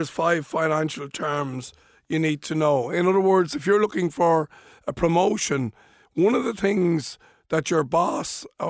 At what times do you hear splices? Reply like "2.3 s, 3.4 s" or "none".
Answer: none